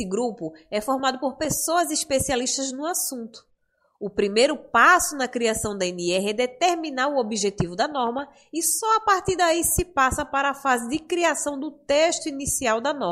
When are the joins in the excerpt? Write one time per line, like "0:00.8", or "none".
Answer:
none